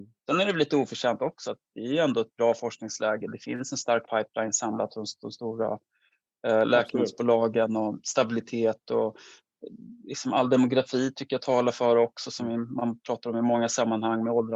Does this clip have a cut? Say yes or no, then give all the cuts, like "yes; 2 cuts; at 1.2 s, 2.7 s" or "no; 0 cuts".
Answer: no; 0 cuts